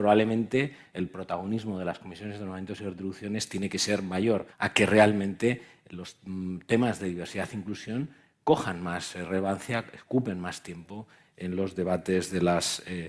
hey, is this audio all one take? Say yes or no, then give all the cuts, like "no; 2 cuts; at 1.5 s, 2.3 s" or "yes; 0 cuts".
no; 1 cut; at 4.5 s